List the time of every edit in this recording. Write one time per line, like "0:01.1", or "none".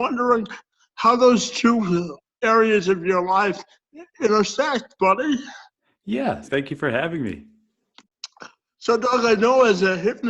0:06.4